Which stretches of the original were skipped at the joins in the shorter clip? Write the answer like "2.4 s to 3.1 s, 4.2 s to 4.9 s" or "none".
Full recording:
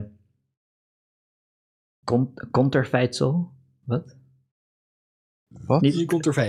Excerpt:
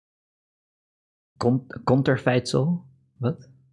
none